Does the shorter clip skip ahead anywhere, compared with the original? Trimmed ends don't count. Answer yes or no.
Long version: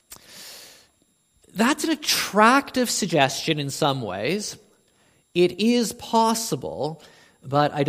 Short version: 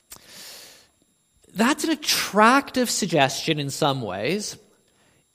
no